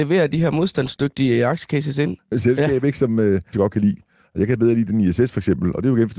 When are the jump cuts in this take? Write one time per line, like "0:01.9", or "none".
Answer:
0:02.3
0:03.5

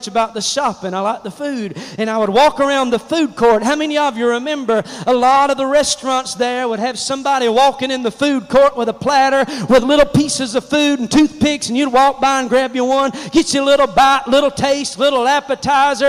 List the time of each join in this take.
none

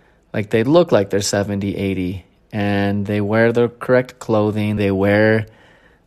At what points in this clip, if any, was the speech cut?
0:04.8

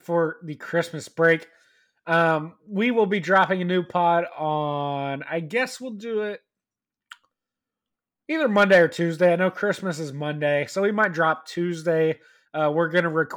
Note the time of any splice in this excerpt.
none

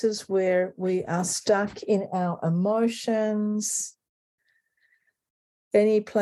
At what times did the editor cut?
none

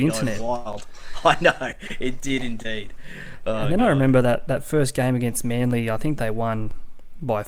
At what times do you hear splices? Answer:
none

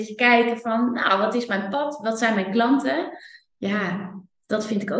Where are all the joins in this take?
none

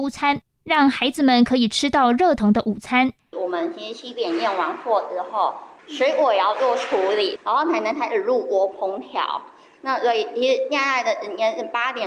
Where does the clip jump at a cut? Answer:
0:02.4
0:05.8
0:07.4

